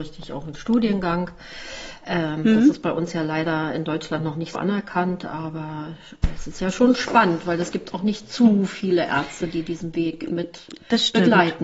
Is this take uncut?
no; 1 cut; at 4.5 s

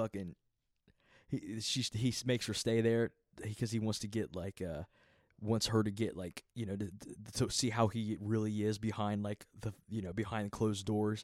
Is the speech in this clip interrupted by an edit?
no; 0 cuts

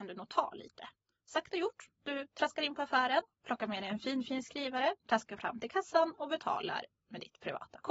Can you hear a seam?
no; 0 cuts

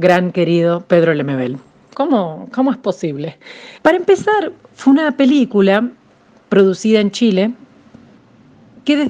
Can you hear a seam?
yes; 2 cuts; at 1.9 s, 3.8 s

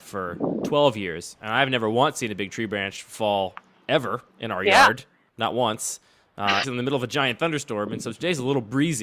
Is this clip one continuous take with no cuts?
no; 2 cuts; at 4.3 s, 6.6 s

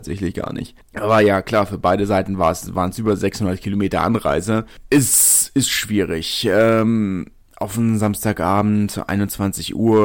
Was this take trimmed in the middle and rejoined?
no; 0 cuts

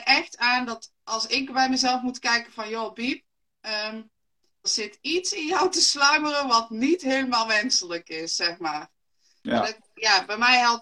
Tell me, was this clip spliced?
yes; 1 cut; at 4.6 s

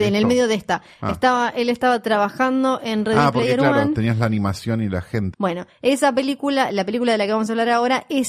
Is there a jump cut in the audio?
yes; 1 cut; at 5.3 s

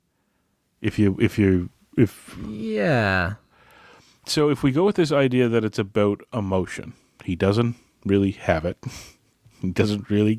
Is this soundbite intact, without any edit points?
yes; 0 cuts

